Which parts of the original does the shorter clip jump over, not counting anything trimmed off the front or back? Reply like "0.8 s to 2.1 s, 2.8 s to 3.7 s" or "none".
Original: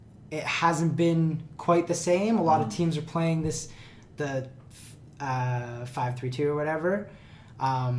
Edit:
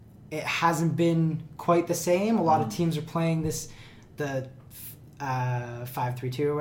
none